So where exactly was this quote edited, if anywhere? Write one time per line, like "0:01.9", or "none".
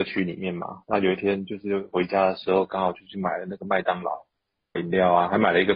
0:04.8